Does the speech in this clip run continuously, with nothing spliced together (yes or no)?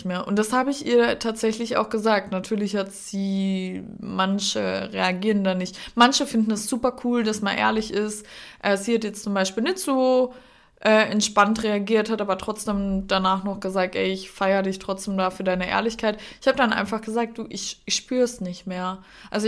yes